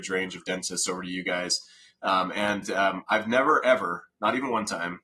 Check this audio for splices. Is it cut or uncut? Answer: uncut